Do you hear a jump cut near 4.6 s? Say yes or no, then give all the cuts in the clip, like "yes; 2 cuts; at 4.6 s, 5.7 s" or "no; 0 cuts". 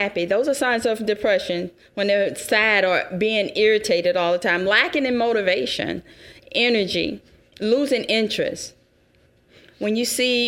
no; 0 cuts